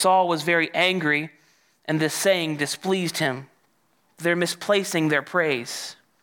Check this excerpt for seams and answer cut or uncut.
cut